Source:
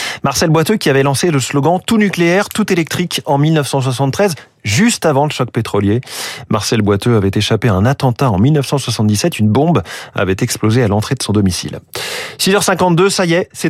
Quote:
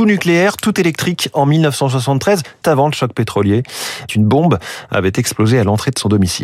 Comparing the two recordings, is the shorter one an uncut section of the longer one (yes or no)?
no